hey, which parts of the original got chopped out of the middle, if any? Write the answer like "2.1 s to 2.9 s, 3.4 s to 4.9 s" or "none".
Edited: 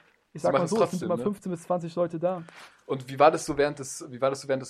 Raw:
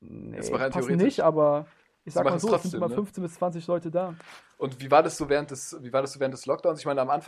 none